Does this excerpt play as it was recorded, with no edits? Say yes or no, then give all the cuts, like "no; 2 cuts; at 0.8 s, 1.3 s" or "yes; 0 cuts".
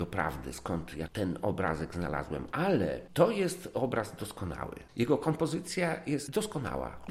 yes; 0 cuts